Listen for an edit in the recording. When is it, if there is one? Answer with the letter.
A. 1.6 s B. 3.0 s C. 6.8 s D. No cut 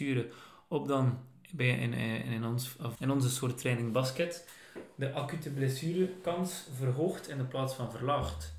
B